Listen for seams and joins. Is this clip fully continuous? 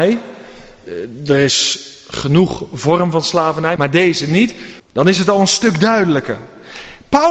no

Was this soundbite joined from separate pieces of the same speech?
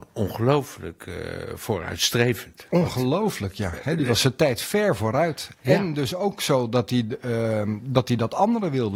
no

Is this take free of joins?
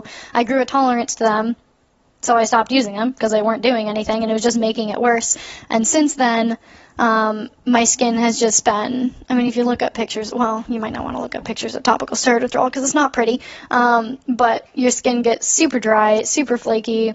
yes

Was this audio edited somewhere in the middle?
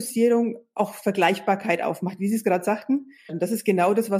yes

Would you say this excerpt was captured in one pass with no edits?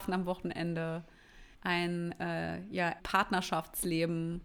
no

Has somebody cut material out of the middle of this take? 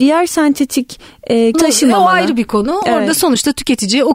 yes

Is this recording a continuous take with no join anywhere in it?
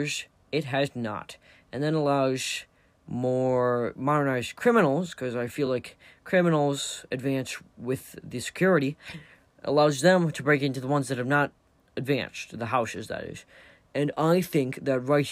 yes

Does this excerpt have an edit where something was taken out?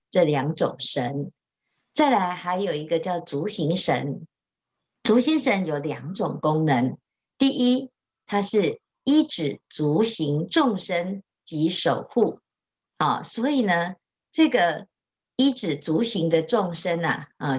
no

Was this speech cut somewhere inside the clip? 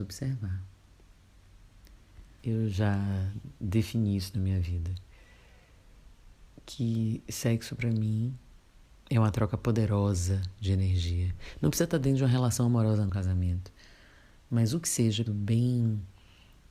yes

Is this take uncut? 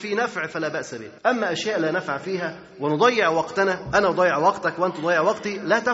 no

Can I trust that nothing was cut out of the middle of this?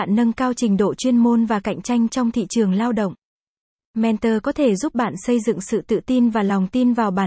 yes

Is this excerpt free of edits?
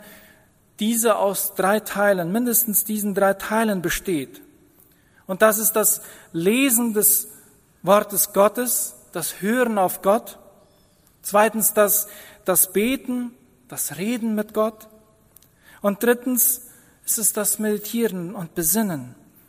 yes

